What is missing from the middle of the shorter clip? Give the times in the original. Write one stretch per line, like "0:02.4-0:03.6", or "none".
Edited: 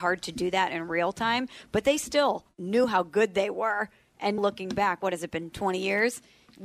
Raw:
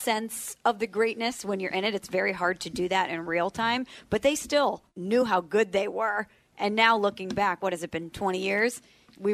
0:06.8-0:07.0